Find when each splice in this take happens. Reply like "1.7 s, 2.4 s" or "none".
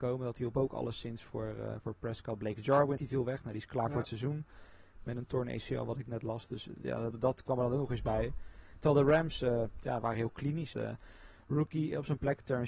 3.0 s, 7.1 s, 10.7 s